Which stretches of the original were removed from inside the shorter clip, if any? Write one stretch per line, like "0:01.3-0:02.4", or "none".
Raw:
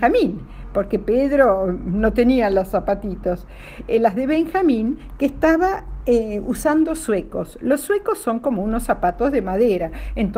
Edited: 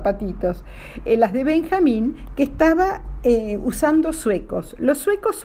none